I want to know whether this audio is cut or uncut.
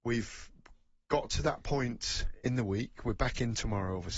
uncut